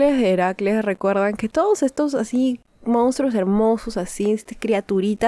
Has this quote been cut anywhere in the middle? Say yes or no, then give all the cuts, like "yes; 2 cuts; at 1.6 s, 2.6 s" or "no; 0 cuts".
no; 0 cuts